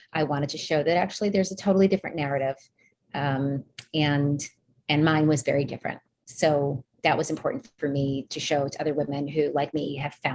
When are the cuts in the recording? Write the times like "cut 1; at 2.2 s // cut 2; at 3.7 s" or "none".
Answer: none